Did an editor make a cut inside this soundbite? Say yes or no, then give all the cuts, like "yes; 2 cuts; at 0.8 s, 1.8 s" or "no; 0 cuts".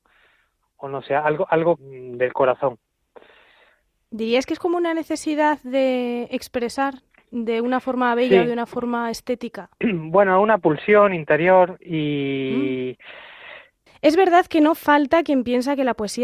yes; 3 cuts; at 1.8 s, 9.7 s, 13.9 s